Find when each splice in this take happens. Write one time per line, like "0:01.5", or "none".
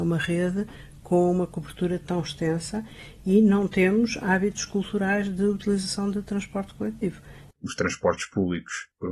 0:07.5